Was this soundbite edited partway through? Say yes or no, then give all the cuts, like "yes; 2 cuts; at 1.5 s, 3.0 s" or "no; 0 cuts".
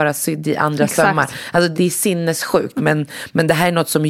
yes; 2 cuts; at 1.7 s, 2.8 s